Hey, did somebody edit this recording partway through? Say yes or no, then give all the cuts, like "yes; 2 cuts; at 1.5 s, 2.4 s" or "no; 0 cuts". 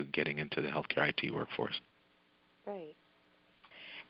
no; 0 cuts